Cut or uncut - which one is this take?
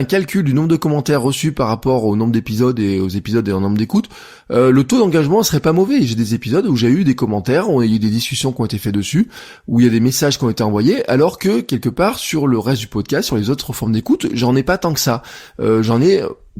uncut